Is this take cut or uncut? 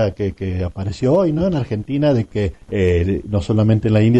uncut